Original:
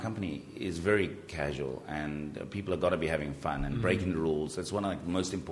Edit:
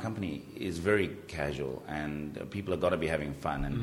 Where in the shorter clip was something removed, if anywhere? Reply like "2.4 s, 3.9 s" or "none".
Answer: none